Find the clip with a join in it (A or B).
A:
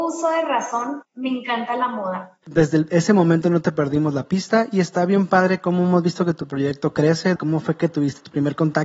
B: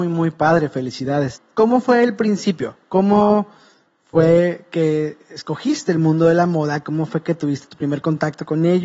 A